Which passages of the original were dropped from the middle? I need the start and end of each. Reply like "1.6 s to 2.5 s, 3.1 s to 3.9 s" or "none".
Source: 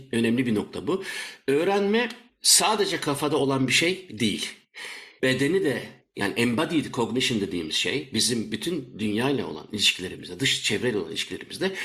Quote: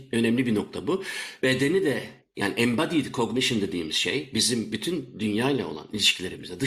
1.4 s to 5.2 s